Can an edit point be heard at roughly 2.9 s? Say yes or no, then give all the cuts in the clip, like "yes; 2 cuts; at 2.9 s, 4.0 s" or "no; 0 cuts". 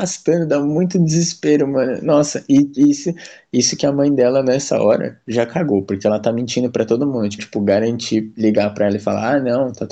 no; 1 cut; at 7.4 s